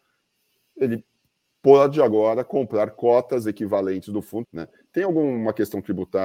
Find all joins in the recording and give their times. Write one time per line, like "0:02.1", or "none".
0:04.4